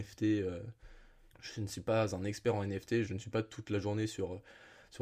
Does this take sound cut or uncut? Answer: cut